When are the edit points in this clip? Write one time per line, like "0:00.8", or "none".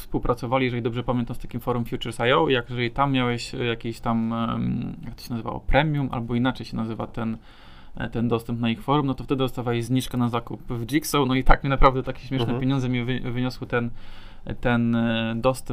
none